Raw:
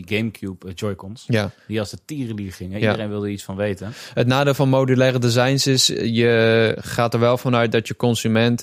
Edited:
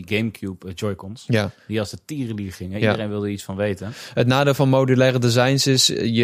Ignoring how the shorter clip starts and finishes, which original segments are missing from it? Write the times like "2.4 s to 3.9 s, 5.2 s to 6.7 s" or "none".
none